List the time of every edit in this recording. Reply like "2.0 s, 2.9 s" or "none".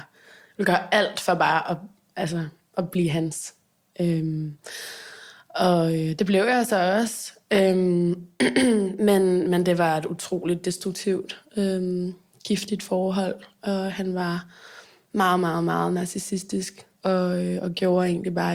none